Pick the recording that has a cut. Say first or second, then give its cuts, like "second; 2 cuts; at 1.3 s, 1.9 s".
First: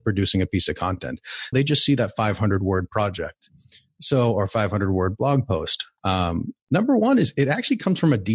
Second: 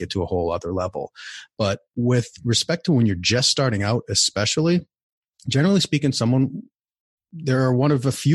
first; 2 cuts; at 1.5 s, 6.0 s